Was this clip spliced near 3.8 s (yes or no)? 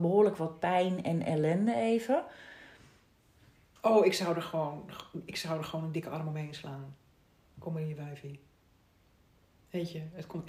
yes